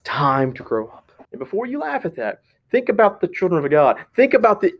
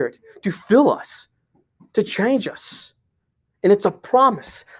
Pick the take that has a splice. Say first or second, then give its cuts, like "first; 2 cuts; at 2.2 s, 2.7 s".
first; 1 cut; at 1.2 s